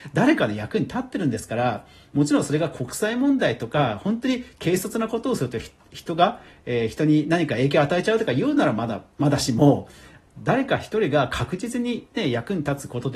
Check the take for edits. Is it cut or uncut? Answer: uncut